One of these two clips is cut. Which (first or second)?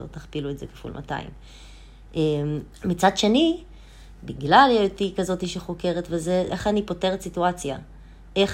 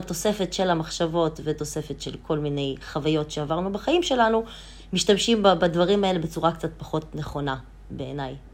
first